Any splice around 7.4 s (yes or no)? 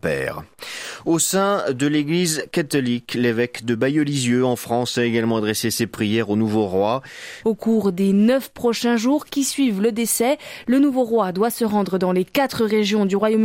yes